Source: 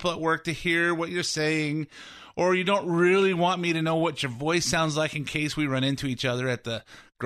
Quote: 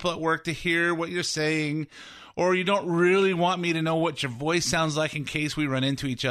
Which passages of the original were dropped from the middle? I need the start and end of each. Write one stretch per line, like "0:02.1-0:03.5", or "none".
none